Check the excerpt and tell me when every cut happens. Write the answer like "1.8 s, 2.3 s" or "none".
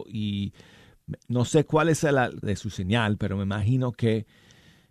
2.4 s